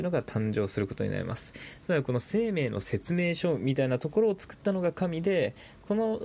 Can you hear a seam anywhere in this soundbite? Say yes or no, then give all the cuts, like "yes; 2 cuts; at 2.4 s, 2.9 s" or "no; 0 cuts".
yes; 1 cut; at 1.8 s